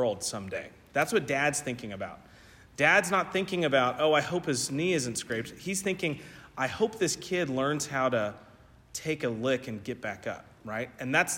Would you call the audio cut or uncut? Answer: uncut